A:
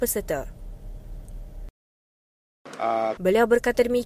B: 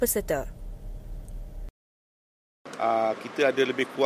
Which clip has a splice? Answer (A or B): A